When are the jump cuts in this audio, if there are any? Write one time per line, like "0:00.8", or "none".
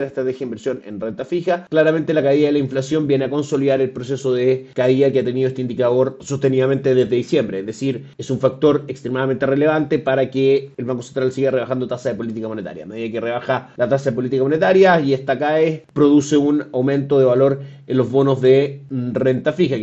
none